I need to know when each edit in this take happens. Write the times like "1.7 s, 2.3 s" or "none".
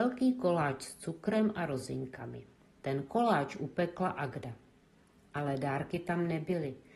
2.6 s